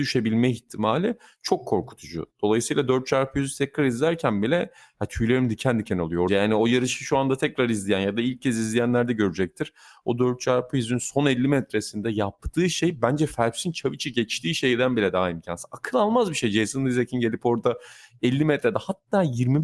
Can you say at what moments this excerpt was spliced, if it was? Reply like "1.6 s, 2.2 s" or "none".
6.3 s

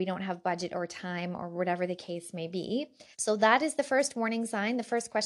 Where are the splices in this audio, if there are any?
3.1 s

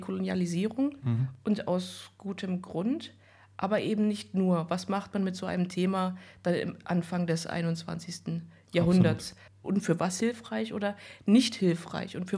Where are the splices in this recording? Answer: 9.6 s

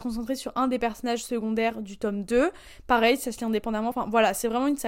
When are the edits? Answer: none

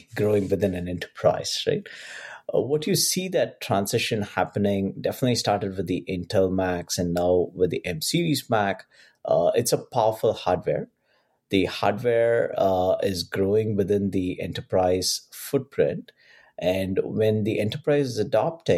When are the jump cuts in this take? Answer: none

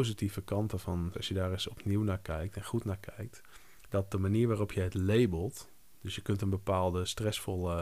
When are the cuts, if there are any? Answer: 1.1 s

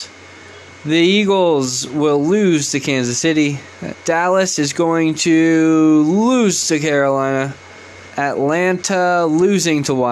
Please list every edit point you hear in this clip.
3.9 s, 8.1 s

